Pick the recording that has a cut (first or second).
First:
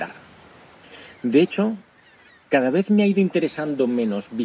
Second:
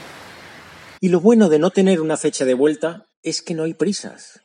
second